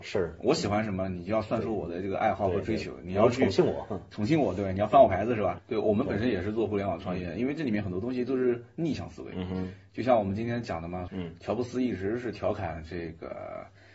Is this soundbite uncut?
no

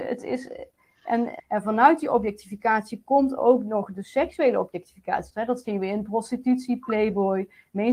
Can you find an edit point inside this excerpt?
yes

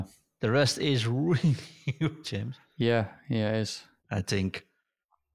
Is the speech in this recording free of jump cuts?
no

